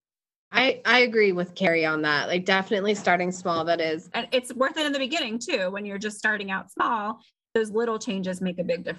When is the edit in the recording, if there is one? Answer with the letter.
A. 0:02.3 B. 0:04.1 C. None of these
B